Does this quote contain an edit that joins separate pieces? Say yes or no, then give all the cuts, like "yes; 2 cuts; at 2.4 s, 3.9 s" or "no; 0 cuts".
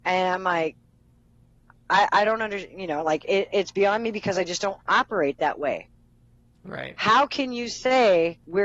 no; 0 cuts